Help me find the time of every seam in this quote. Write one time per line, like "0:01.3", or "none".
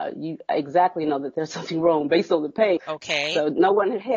0:02.8